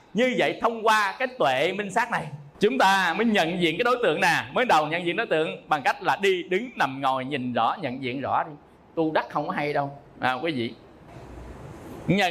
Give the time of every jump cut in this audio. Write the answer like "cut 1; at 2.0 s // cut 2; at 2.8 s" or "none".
cut 1; at 2.5 s